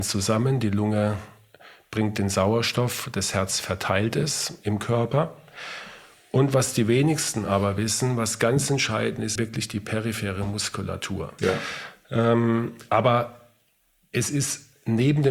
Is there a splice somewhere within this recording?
yes; 2 cuts; at 9.4 s, 11.4 s

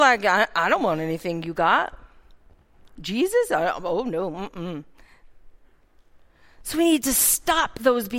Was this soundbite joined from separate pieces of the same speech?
no; 0 cuts

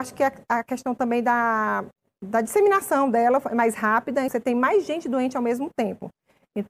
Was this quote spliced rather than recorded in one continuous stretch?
yes; 1 cut; at 4.3 s

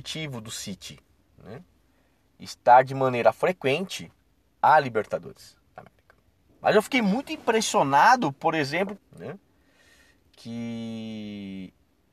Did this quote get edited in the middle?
yes; 2 cuts; at 6.5 s, 9.0 s

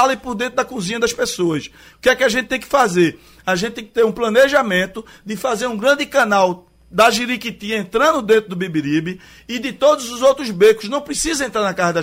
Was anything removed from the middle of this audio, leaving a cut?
yes; 1 cut; at 1.9 s

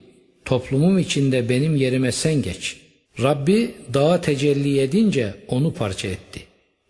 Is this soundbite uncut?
no; 2 cuts; at 3.0 s, 5.7 s

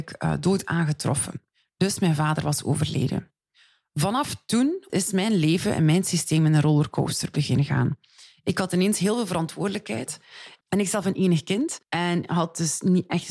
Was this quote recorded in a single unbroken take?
no; 3 cuts; at 4.9 s, 10.6 s, 11.8 s

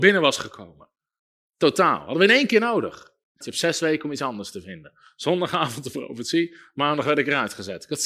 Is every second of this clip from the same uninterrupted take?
no; 1 cut; at 3.4 s

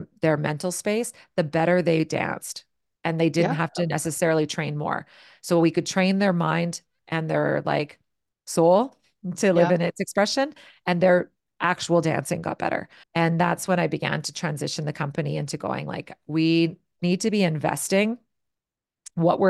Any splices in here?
yes; 1 cut; at 13.0 s

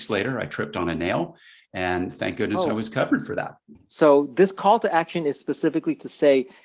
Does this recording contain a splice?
yes; 1 cut; at 3.7 s

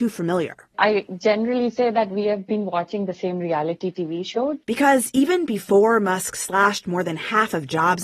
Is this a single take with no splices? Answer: no; 1 cut; at 4.6 s

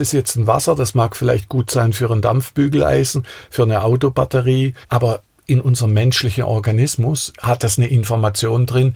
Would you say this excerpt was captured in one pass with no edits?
no; 1 cut; at 4.8 s

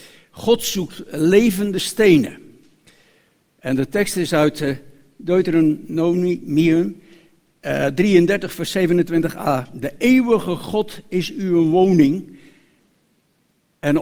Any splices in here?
no; 0 cuts

